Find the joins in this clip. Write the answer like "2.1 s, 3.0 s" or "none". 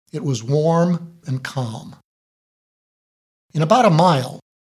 1.2 s